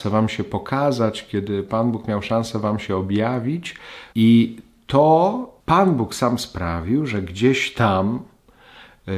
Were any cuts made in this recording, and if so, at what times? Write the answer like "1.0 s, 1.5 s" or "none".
4.1 s, 5.6 s